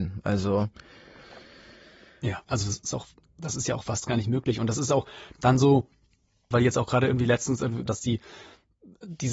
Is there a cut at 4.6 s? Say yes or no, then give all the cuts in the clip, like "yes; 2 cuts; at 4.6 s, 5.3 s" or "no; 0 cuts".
no; 3 cuts; at 2.5 s, 6.5 s, 7.9 s